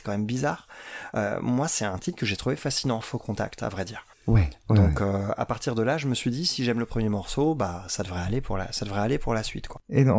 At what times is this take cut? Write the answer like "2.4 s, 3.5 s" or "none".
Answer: none